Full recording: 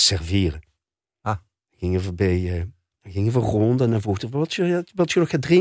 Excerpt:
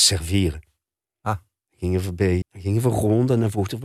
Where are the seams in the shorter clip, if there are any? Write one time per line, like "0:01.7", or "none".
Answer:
0:02.4